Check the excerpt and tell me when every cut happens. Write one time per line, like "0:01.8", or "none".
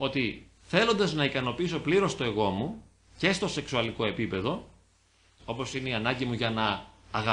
0:05.4